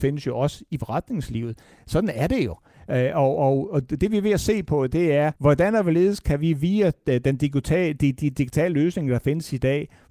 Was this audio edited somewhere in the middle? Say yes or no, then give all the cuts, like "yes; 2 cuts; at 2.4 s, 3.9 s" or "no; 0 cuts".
yes; 2 cuts; at 1.8 s, 5.4 s